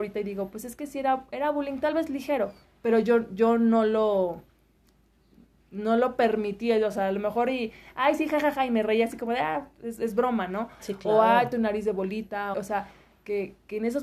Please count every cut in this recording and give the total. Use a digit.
2